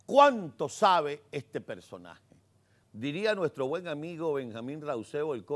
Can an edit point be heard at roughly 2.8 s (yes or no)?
yes